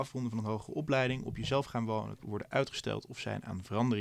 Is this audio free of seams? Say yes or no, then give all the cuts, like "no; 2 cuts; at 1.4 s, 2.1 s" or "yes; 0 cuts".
no; 1 cut; at 2.2 s